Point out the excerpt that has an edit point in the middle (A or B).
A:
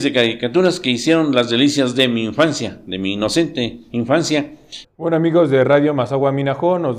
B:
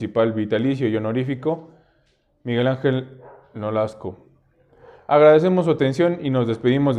A